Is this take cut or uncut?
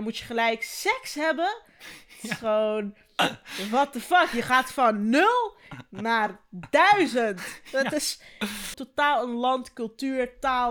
cut